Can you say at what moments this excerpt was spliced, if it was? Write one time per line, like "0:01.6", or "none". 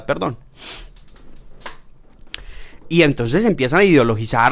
0:02.8

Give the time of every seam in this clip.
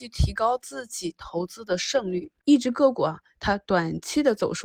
0:02.4

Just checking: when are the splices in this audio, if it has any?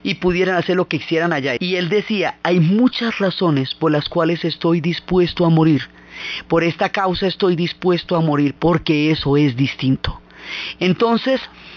0:01.6
0:08.6

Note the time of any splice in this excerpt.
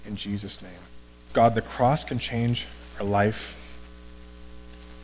0:01.3

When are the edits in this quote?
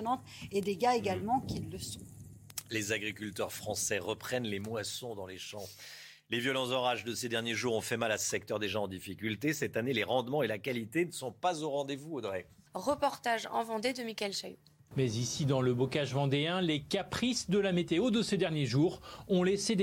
0:12.7
0:14.9

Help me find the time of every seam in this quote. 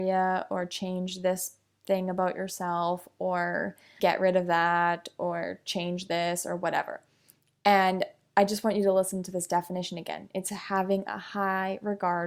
0:04.0

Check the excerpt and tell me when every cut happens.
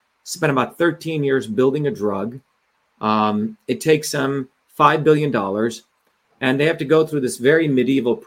none

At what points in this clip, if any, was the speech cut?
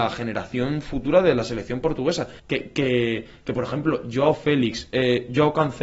0:02.4
0:04.9

